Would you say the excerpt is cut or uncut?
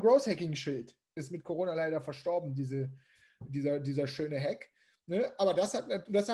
cut